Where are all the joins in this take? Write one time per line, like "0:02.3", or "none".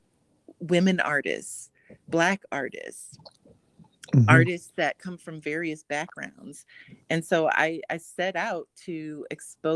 none

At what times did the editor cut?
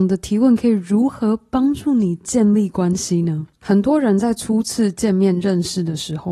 0:03.5

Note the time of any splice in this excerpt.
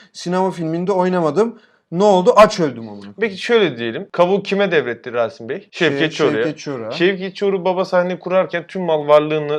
none

